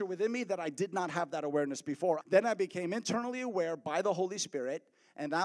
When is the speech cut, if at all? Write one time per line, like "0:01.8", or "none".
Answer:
0:02.2